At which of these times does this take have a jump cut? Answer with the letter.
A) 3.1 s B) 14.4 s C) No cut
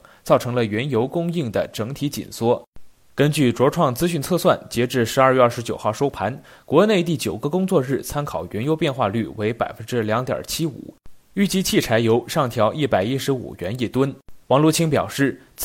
B